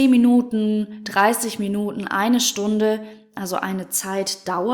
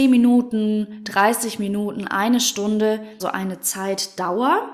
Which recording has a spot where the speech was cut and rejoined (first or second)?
second